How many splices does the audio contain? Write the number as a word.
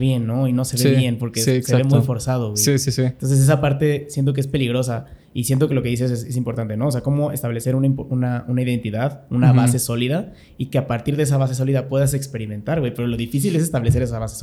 zero